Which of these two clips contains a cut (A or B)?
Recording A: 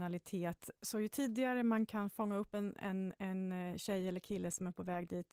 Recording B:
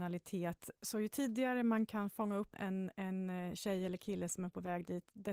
B